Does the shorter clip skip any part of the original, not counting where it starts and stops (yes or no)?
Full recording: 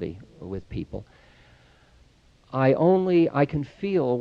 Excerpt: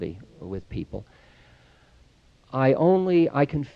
no